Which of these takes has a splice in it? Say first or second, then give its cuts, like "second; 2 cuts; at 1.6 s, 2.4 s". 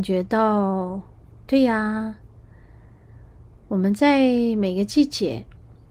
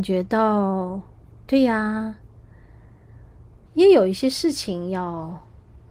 second; 1 cut; at 3.7 s